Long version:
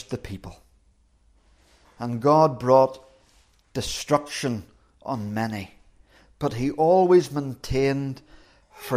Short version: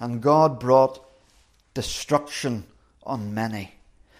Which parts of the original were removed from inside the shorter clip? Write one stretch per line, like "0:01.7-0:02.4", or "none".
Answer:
none